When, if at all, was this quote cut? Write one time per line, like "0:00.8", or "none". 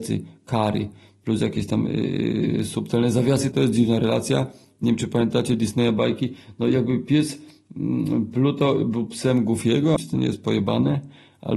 0:03.5
0:10.0